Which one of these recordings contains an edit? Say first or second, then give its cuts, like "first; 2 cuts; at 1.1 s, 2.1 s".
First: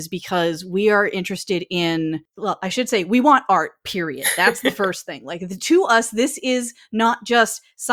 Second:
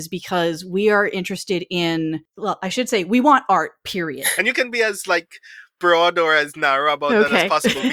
second; 1 cut; at 4.4 s